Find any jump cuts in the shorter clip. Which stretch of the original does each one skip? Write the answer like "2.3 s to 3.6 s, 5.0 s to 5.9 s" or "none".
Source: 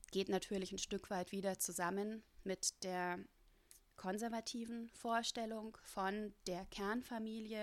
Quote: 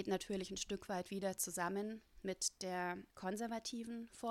3.3 s to 3.9 s